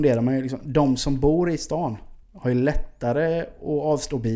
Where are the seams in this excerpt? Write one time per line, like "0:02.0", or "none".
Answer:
0:02.2